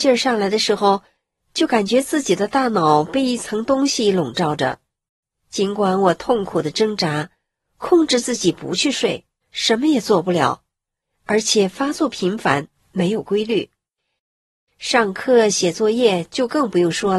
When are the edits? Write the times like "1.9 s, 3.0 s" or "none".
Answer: 9.4 s, 14.6 s